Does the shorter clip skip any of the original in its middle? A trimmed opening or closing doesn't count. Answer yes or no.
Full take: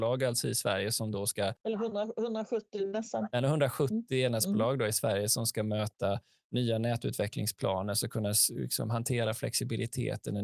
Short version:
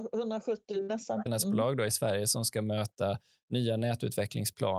yes